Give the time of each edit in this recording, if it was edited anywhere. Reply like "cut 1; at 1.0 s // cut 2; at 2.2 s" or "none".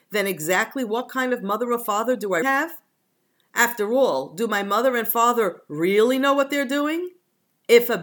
cut 1; at 2.4 s